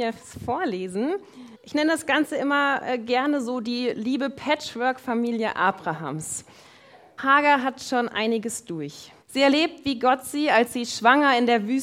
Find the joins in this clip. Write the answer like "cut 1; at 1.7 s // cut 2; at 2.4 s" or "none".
cut 1; at 1.5 s // cut 2; at 7.2 s // cut 3; at 9.2 s